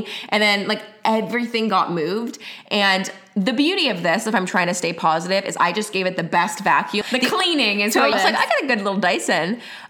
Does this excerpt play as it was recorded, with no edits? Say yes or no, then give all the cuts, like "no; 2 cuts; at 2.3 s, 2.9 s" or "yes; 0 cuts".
no; 2 cuts; at 7.0 s, 8.1 s